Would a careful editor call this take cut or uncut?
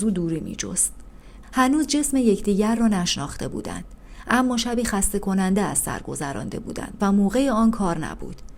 cut